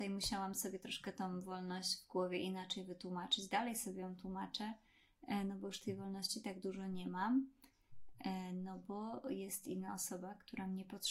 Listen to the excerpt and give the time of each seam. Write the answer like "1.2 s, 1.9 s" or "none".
none